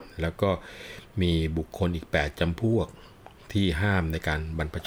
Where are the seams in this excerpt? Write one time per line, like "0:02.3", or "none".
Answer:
none